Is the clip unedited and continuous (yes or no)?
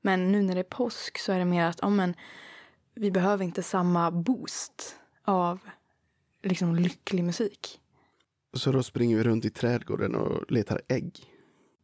yes